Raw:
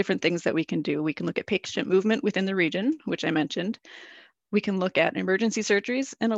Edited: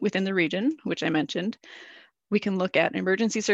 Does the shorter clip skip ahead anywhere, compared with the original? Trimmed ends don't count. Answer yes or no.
no